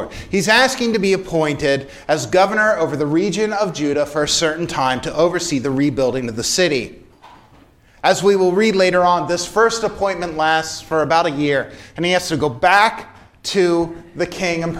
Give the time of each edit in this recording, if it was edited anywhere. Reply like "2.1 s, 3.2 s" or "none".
none